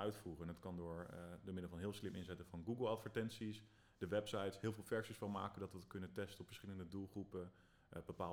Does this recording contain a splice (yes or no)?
no